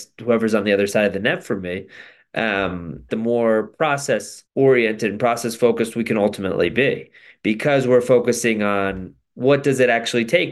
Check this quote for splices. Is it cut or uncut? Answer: cut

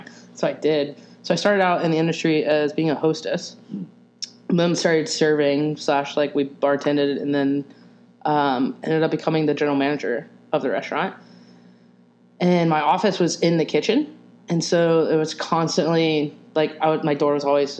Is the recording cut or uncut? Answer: uncut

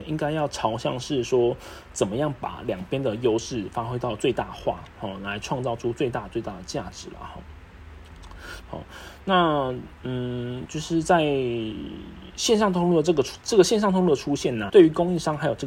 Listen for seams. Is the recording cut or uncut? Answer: cut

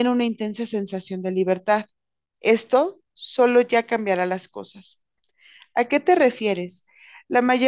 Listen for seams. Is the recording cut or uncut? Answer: uncut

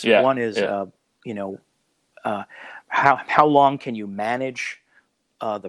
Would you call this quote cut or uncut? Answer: uncut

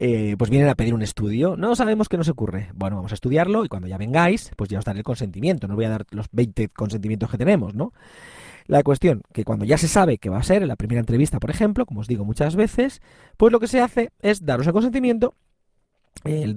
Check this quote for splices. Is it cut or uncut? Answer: uncut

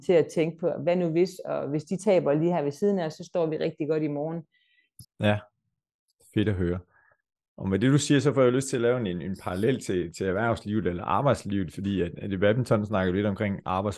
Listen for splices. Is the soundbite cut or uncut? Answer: cut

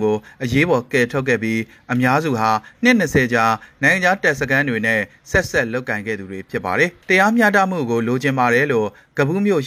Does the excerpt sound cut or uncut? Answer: uncut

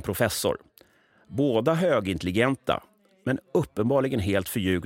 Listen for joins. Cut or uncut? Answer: uncut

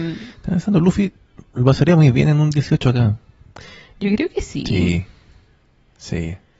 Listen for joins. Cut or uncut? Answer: uncut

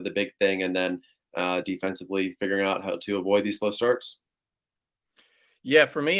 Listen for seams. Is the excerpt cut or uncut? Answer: uncut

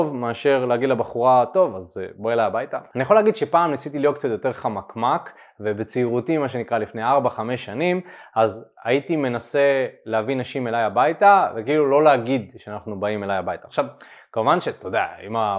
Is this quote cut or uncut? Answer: uncut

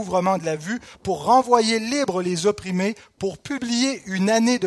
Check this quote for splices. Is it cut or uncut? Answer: uncut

